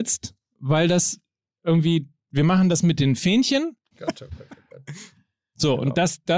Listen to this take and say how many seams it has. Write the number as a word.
one